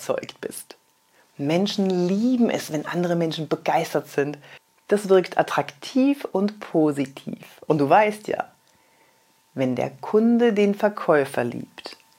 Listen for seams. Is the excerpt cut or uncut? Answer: uncut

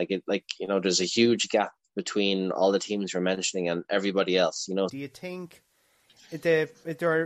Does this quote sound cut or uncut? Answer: cut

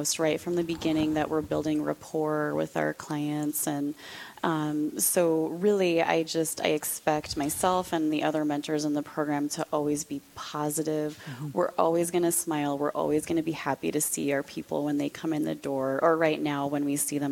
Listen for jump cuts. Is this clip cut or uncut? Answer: uncut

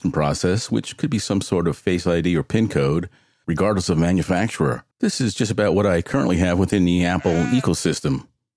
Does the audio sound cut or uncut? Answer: cut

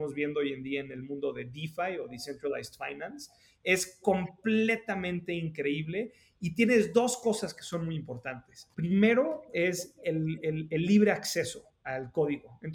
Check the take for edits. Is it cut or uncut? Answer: cut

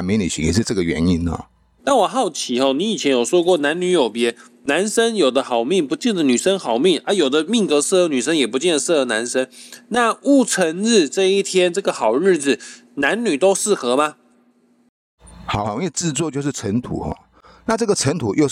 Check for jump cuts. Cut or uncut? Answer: cut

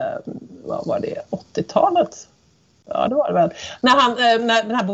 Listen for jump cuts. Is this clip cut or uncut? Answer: uncut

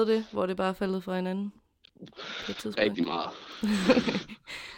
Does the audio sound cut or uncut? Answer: uncut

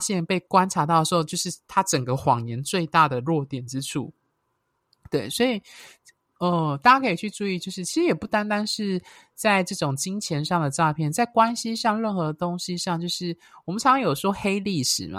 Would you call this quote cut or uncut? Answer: uncut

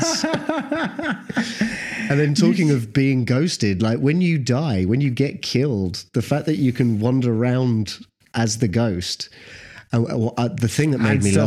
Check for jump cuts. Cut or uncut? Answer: uncut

